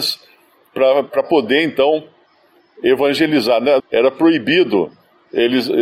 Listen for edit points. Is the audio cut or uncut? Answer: cut